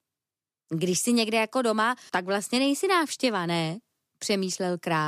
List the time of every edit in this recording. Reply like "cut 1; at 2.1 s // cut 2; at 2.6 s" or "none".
cut 1; at 2.1 s

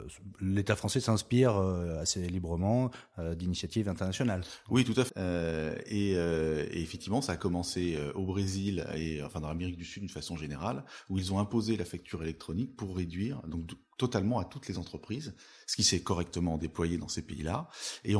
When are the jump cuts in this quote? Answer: cut 1; at 5.1 s

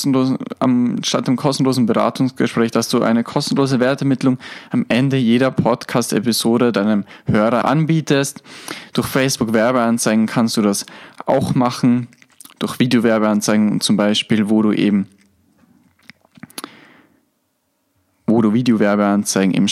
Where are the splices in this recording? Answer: cut 1; at 7.6 s

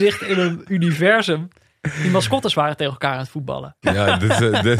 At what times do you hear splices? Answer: cut 1; at 3.8 s

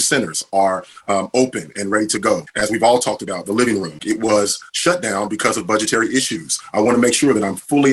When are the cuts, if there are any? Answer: cut 1; at 4.0 s

